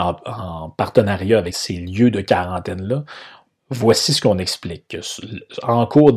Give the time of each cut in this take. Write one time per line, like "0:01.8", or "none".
0:01.5